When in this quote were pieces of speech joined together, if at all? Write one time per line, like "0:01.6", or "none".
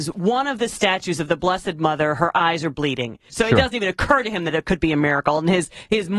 0:03.3